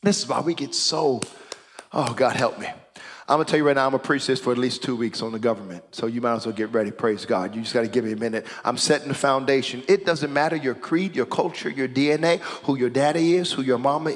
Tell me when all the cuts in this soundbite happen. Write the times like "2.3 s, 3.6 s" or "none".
none